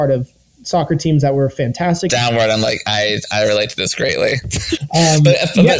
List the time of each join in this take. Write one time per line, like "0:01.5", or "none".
0:02.1
0:04.8